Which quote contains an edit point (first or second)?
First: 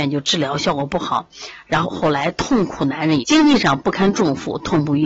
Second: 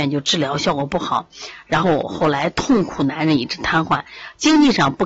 first